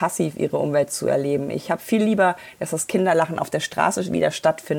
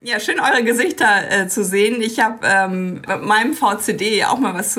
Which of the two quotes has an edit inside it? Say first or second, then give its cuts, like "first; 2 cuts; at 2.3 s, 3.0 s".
second; 1 cut; at 3.1 s